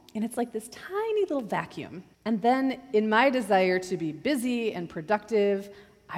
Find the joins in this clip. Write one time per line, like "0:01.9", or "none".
0:02.1